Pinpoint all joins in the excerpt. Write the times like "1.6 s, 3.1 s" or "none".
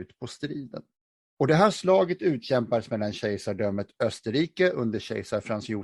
1.3 s

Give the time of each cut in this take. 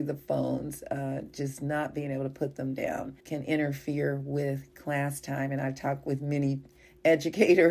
3.2 s

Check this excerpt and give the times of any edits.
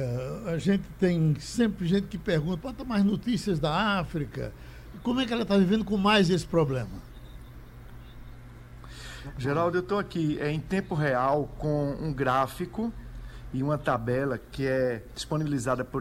2.6 s, 4.9 s

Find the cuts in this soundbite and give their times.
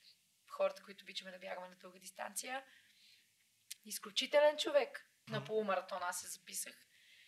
3.8 s, 5.3 s

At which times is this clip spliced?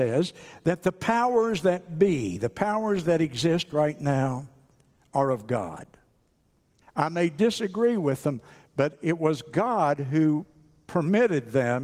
6.8 s

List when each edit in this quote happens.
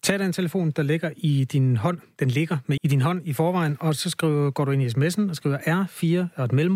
2.8 s

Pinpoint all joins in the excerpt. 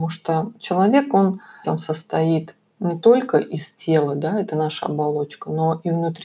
1.6 s

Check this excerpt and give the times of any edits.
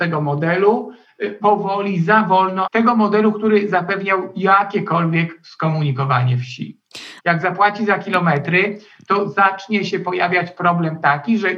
1.4 s, 2.6 s, 7.2 s

